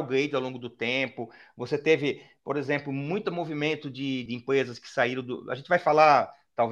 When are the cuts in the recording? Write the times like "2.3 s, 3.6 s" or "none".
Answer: 4.3 s